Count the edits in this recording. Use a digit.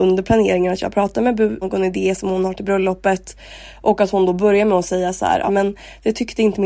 2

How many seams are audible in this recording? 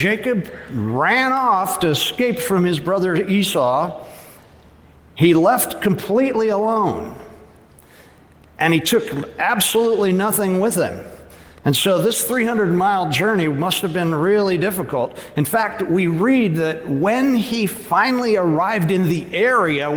0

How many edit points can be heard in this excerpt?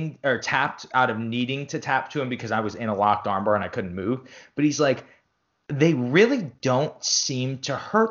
0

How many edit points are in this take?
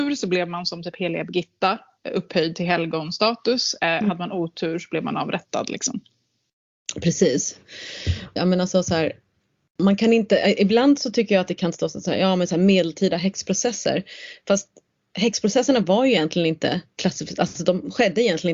1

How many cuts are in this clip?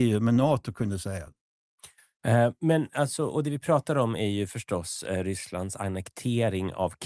0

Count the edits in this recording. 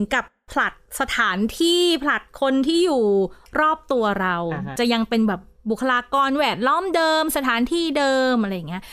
0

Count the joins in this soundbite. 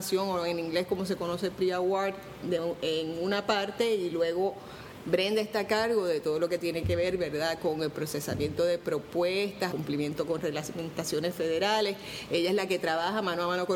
2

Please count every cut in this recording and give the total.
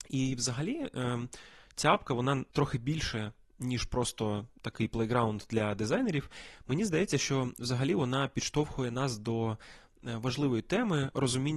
1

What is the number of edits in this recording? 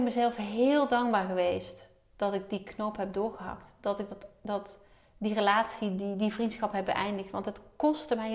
0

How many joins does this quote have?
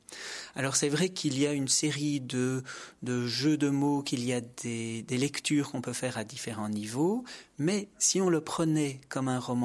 0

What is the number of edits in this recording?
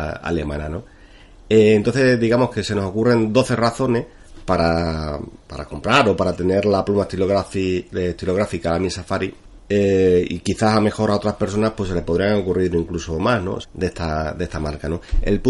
1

